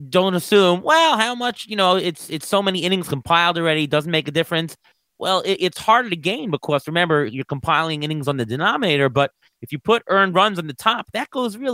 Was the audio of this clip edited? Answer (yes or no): no